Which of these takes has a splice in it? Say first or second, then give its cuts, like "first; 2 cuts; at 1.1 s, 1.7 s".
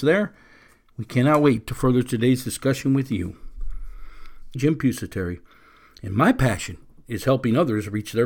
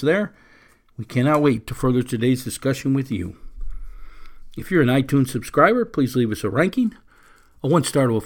first; 1 cut; at 4.5 s